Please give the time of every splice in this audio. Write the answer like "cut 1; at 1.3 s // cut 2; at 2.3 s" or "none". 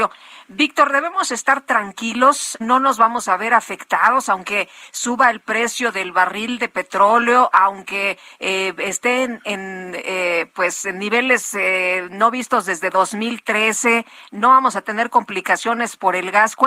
cut 1; at 2.6 s